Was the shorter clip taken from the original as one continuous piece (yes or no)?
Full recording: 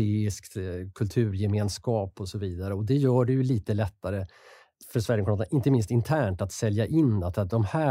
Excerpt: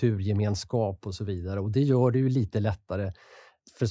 yes